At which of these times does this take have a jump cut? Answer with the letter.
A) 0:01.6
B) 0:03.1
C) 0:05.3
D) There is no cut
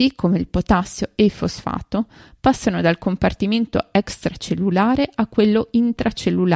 D